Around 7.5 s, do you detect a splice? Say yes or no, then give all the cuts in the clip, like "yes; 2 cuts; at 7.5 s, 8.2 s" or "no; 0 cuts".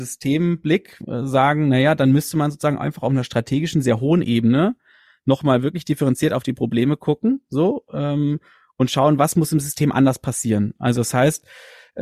no; 1 cut; at 10.8 s